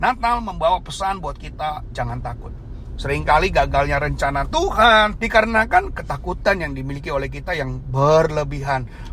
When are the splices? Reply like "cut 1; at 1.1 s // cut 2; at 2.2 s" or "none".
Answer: cut 1; at 3.0 s // cut 2; at 5.2 s

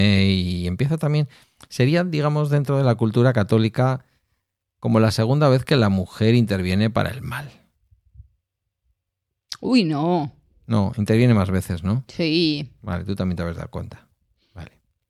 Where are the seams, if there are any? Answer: none

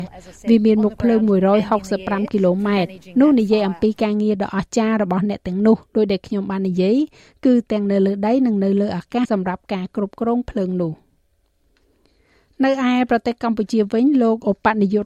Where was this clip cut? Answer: cut 1; at 9.2 s

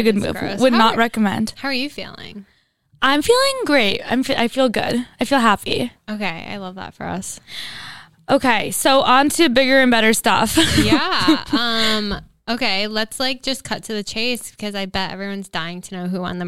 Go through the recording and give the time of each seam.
none

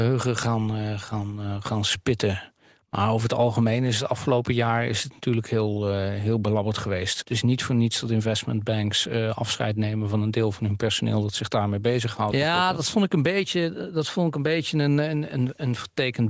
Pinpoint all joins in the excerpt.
cut 1; at 7.2 s // cut 2; at 12.3 s

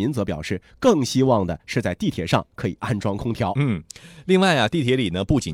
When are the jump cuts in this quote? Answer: none

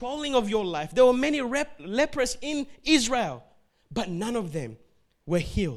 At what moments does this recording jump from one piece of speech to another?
none

